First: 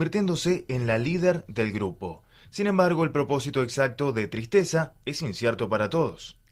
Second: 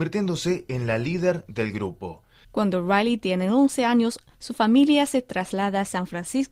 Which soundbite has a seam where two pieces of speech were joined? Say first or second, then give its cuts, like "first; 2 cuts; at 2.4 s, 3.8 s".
second; 1 cut; at 2.4 s